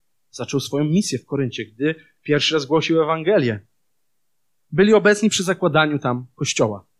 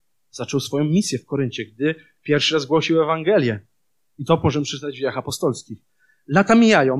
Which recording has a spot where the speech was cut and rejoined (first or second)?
second